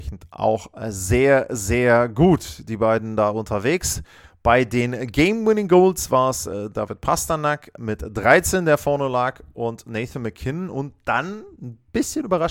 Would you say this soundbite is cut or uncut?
uncut